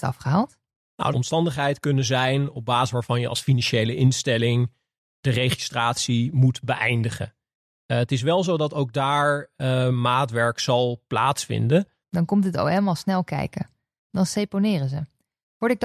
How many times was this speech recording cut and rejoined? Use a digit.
3